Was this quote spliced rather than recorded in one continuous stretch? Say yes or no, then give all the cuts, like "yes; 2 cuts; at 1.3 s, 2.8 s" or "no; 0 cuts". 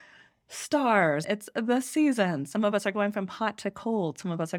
yes; 1 cut; at 1.2 s